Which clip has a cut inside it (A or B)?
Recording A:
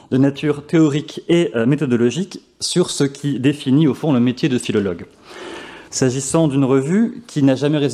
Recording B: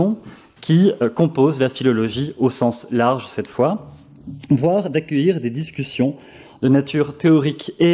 A